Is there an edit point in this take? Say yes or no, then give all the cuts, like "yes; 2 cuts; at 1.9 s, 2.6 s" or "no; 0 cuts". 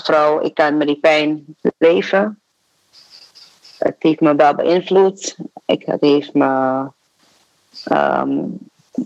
no; 0 cuts